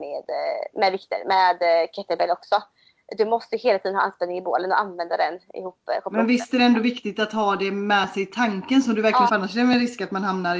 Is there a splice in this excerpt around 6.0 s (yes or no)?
no